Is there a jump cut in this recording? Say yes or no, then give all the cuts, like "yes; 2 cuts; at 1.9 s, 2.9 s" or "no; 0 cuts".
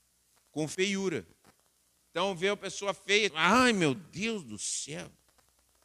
yes; 1 cut; at 3.3 s